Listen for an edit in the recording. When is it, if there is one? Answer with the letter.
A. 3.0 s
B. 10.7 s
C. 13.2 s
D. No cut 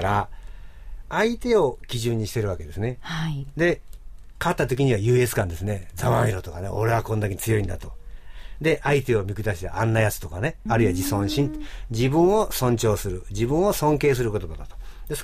B